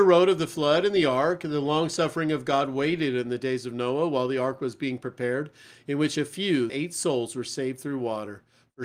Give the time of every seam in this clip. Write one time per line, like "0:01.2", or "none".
0:06.7